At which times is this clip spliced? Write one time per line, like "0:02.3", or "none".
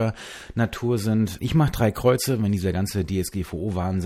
0:01.4